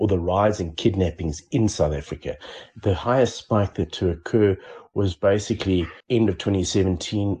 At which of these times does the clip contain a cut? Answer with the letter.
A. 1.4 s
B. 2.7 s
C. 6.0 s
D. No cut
C